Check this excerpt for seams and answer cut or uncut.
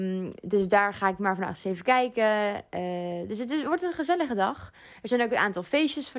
uncut